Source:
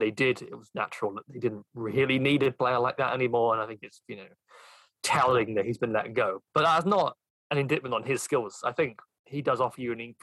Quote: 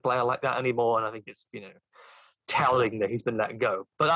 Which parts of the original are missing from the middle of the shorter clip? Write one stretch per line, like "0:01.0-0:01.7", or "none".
none